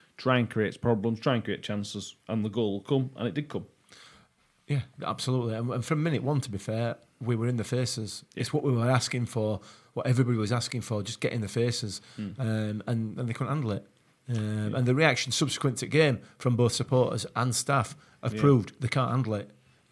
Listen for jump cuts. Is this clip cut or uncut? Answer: uncut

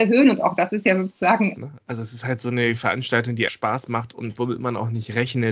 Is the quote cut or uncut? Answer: cut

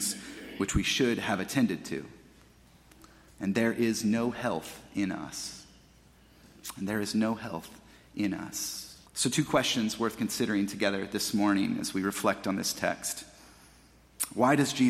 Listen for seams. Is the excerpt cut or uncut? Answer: cut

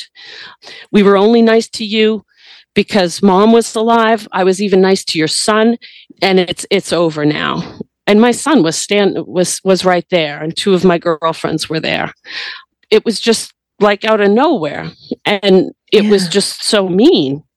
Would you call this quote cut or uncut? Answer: uncut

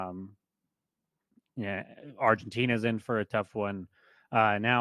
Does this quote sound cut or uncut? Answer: uncut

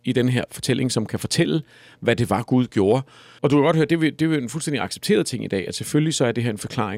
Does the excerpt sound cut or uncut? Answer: cut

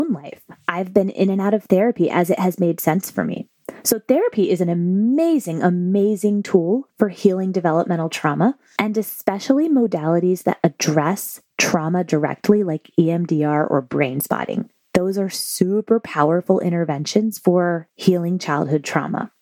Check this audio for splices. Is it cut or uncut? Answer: uncut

